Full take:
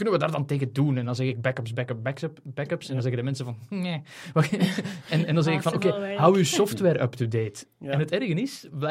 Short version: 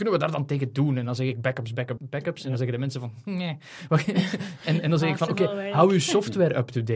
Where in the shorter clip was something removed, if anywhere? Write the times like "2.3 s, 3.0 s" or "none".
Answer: 2.0 s